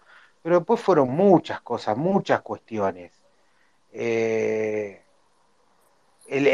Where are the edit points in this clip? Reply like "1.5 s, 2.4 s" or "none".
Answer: none